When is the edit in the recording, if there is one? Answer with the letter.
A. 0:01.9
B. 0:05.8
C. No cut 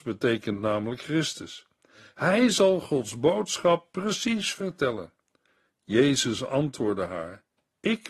C